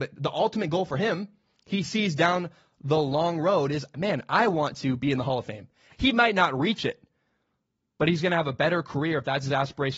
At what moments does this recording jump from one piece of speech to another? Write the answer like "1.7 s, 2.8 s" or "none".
5.9 s